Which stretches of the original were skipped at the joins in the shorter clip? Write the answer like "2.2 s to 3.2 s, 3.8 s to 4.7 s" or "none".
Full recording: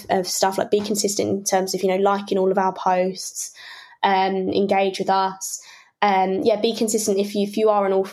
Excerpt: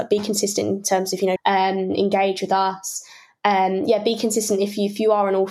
2.0 s to 3.9 s